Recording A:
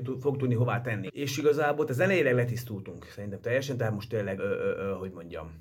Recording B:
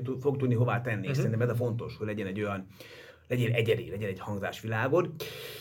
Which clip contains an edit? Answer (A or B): A